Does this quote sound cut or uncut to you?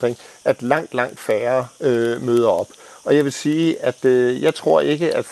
uncut